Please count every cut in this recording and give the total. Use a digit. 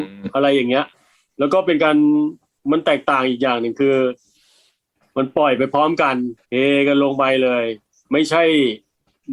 1